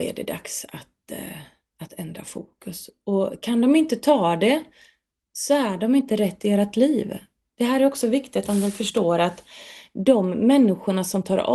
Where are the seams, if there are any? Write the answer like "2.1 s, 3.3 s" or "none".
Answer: none